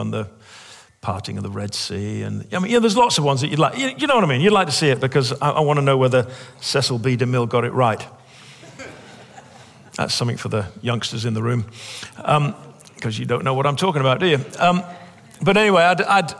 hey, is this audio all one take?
yes; 0 cuts

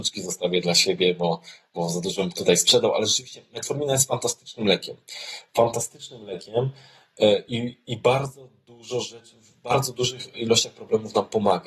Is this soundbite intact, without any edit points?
yes; 0 cuts

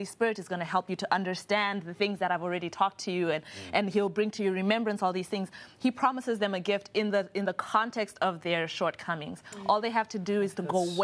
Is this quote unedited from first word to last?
yes; 0 cuts

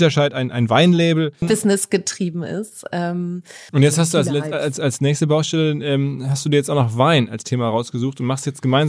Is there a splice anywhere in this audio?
yes; 2 cuts; at 1.4 s, 3.7 s

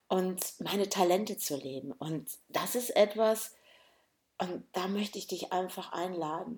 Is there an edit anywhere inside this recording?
no; 0 cuts

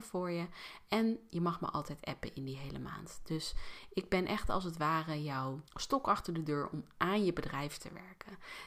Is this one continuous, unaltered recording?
no; 1 cut; at 5.7 s

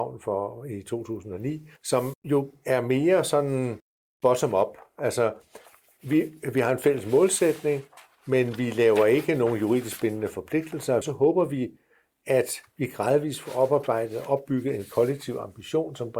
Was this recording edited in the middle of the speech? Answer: yes; 2 cuts; at 1.8 s, 11.0 s

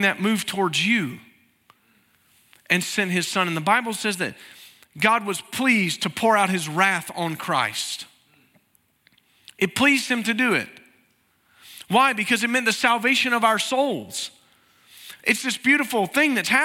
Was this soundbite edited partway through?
yes; 1 cut; at 15.2 s

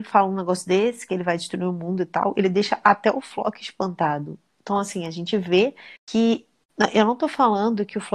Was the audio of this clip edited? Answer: yes; 1 cut; at 6.0 s

